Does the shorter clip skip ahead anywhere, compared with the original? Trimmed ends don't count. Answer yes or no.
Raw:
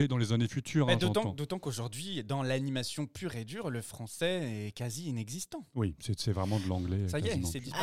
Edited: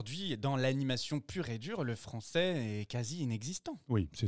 no